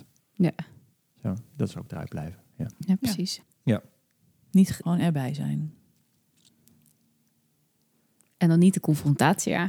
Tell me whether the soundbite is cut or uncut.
cut